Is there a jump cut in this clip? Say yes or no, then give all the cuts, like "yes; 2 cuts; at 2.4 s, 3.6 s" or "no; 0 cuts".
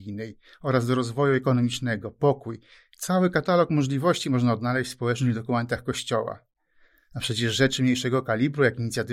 no; 0 cuts